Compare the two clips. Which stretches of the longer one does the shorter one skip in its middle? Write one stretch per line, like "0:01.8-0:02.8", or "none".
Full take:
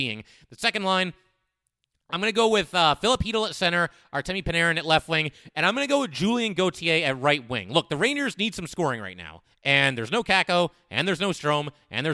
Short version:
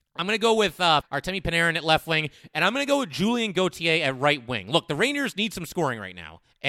0:03.0-0:04.0